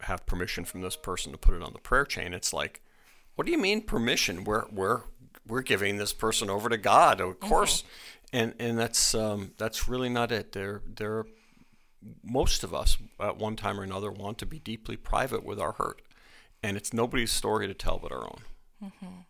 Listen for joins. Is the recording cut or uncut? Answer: uncut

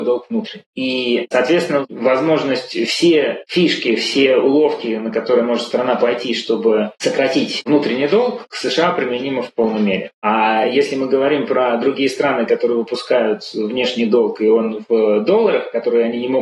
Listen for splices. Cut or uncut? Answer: uncut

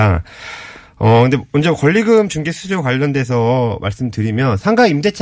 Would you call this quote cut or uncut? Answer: uncut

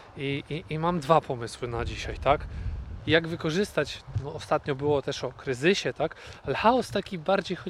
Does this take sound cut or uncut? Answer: cut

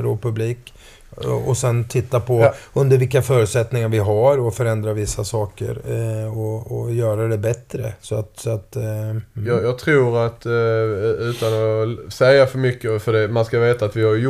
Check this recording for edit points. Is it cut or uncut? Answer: uncut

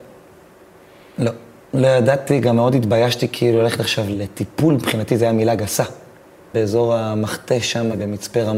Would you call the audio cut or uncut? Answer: cut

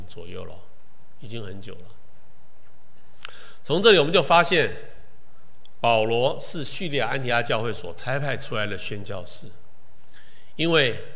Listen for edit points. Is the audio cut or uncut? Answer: uncut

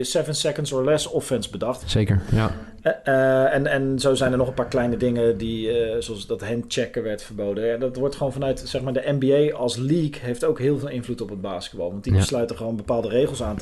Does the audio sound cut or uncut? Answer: cut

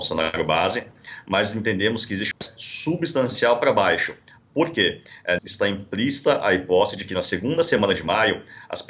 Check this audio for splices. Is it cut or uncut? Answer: cut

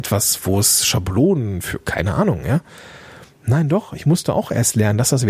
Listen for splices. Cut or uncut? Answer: uncut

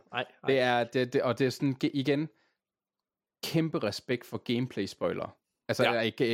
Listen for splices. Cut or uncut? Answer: uncut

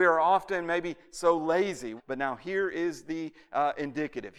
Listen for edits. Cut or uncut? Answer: cut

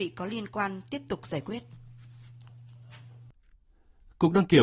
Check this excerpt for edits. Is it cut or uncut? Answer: uncut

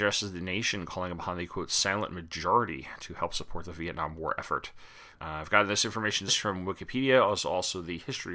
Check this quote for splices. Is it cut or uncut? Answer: cut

